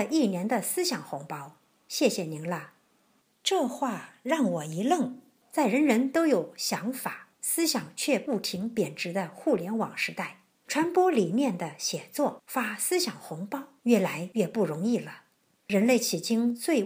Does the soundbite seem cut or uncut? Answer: uncut